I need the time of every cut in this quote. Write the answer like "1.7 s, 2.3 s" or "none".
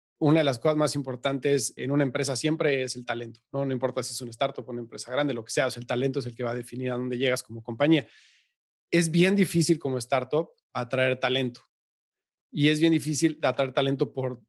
1.8 s